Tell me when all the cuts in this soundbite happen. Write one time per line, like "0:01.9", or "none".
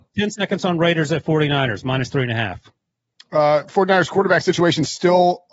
none